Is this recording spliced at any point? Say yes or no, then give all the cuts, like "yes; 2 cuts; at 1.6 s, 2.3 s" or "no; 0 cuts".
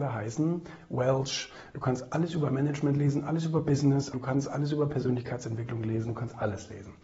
yes; 1 cut; at 4.1 s